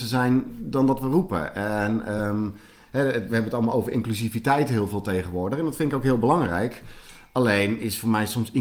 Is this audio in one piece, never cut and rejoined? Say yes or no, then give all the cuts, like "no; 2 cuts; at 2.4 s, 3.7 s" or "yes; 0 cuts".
yes; 0 cuts